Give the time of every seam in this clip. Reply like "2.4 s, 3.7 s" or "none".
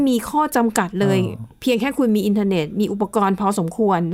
none